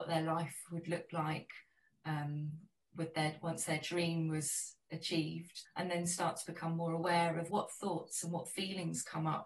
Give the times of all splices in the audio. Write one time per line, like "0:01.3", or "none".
0:05.7
0:07.5